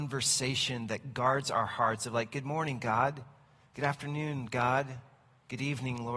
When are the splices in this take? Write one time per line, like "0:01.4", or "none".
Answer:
none

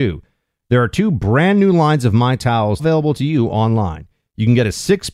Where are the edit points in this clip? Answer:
0:02.8

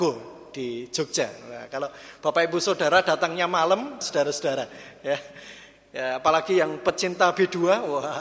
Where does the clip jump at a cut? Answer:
0:04.0

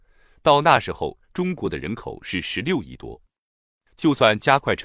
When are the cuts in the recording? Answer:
none

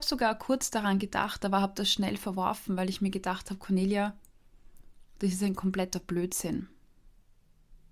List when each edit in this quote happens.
none

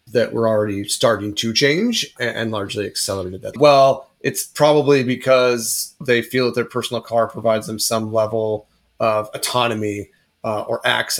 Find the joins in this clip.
0:03.5

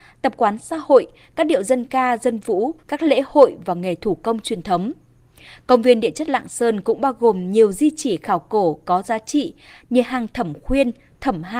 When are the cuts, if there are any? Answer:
0:02.8

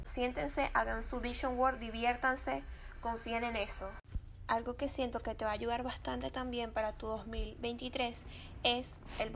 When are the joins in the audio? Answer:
0:02.9

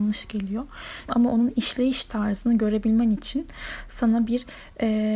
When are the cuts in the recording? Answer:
0:01.1

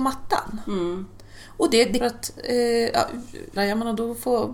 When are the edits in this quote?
0:02.0
0:03.6

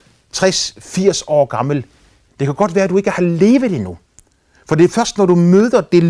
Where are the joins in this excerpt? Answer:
0:02.3

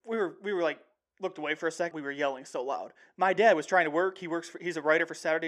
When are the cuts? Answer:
0:01.9

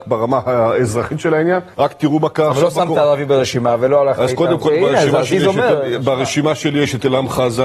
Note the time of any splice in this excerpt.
0:01.7

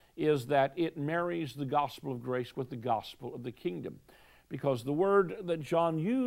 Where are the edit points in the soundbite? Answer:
none

